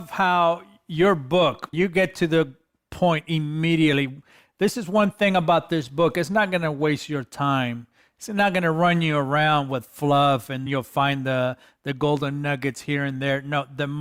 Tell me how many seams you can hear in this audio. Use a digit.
2